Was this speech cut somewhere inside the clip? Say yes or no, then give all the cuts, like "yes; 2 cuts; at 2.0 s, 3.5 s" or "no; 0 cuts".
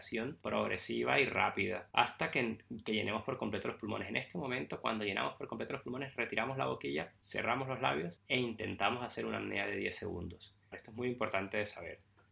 yes; 1 cut; at 10.7 s